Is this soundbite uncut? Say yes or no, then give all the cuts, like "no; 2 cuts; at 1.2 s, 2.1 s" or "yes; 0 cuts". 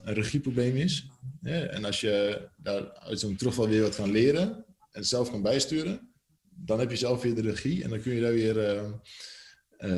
yes; 0 cuts